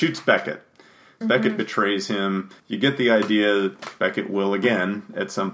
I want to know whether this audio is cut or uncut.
cut